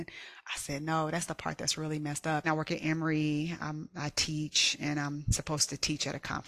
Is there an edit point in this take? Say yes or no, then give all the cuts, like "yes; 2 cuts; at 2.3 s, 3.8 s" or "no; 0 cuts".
yes; 1 cut; at 2.4 s